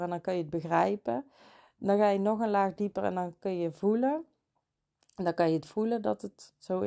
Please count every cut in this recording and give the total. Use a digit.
0